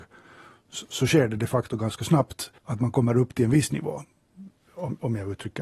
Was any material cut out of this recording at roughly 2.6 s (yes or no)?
yes